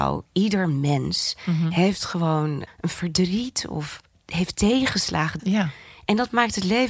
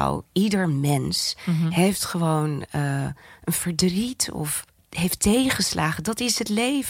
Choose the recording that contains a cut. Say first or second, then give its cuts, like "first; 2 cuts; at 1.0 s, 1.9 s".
first; 2 cuts; at 2.7 s, 5.4 s